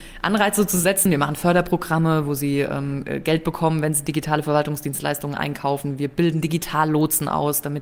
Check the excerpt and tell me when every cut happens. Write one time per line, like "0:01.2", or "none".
none